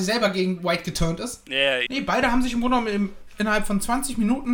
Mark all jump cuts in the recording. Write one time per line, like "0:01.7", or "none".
0:01.9